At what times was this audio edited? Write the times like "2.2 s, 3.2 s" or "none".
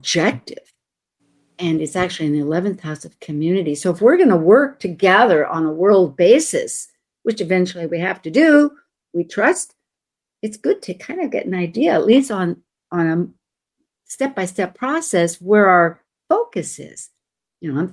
none

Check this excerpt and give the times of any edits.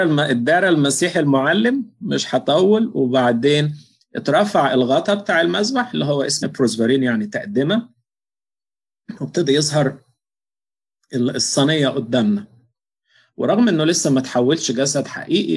6.4 s

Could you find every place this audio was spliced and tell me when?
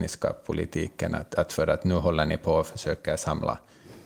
1.5 s

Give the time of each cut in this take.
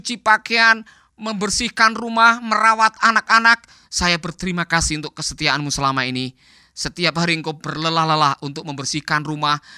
3.8 s

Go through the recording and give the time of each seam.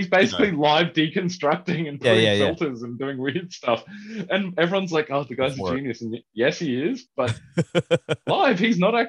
none

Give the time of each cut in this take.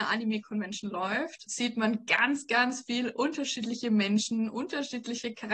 1.5 s

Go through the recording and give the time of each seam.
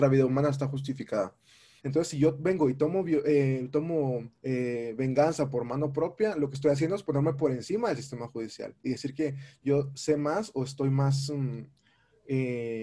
1.8 s, 4.3 s

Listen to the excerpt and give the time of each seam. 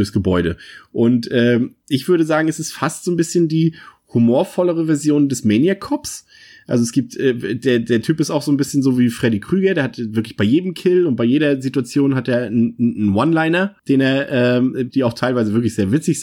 13.8 s, 14.9 s

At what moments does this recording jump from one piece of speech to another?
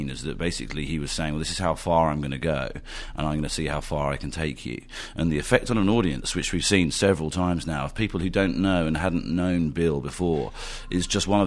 none

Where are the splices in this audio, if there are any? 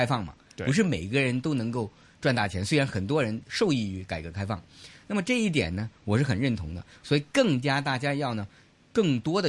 none

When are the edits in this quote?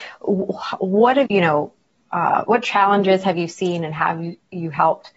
1.3 s, 2.4 s

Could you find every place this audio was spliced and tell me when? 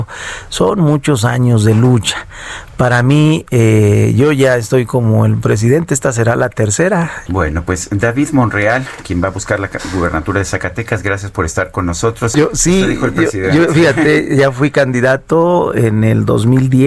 7.3 s, 9.0 s, 12.3 s

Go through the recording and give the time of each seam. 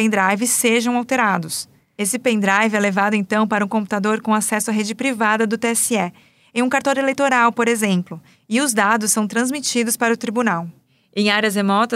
none

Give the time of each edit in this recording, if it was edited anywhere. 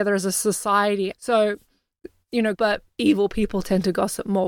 1.1 s, 2.5 s

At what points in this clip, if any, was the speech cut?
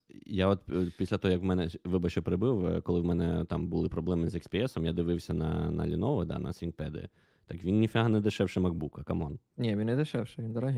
none

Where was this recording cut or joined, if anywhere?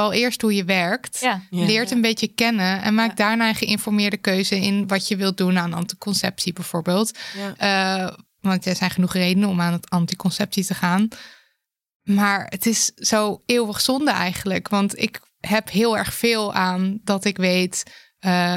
none

